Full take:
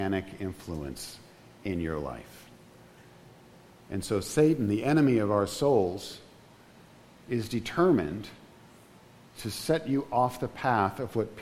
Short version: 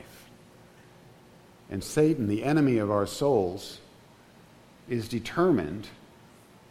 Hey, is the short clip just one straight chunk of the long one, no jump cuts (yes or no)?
no